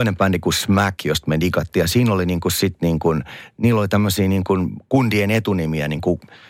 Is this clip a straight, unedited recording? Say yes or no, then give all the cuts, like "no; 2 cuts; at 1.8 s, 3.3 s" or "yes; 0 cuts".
yes; 0 cuts